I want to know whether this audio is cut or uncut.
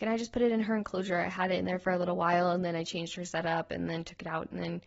uncut